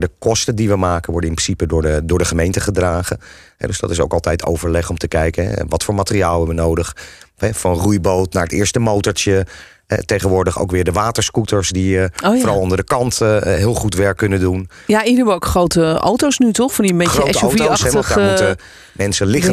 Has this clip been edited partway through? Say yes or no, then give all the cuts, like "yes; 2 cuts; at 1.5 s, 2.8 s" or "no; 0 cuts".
no; 0 cuts